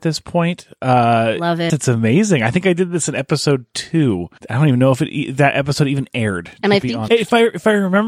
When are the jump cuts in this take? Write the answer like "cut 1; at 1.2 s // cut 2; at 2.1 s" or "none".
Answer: cut 1; at 1.7 s // cut 2; at 7.1 s